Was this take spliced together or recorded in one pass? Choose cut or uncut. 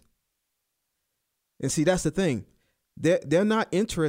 uncut